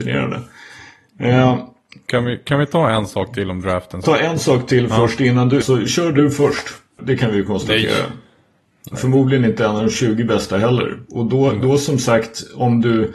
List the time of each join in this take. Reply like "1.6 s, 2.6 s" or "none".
4.0 s, 5.6 s, 7.0 s